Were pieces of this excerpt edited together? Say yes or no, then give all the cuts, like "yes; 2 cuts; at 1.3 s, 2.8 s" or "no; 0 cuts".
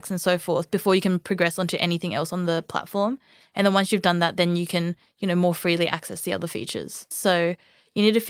yes; 2 cuts; at 3.4 s, 7.1 s